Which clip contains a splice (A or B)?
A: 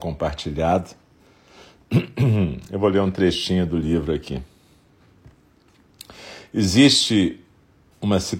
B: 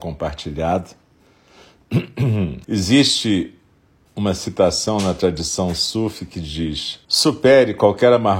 B